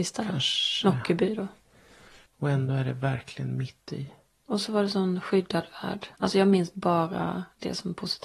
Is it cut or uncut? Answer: cut